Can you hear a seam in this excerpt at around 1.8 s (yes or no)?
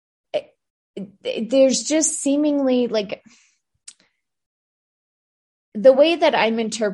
no